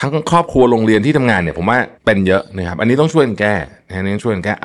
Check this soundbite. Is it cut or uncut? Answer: cut